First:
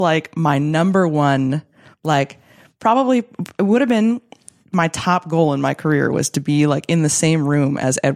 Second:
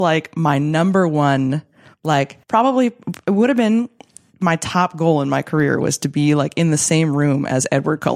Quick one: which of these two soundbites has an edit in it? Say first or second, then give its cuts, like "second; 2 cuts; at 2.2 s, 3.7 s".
second; 1 cut; at 2.4 s